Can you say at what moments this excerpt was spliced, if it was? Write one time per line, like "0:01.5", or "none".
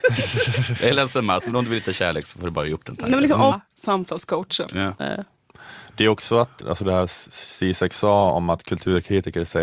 0:03.5
0:05.0
0:06.6